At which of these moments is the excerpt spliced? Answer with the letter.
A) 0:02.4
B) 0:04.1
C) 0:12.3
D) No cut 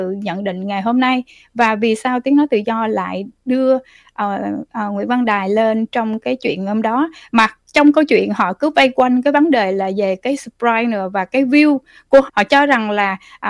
C